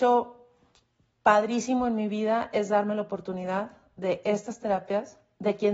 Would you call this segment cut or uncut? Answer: uncut